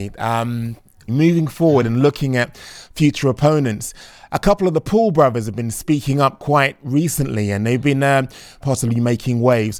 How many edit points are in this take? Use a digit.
2